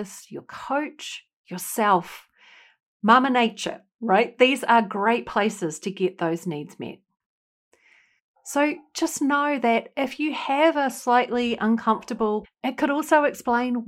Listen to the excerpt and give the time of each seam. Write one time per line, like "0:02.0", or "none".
0:12.4